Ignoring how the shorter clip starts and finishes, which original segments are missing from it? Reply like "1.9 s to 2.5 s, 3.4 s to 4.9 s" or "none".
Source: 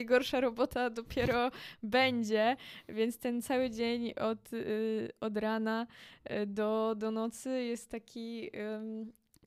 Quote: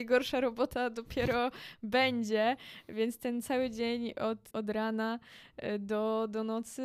4.5 s to 5.2 s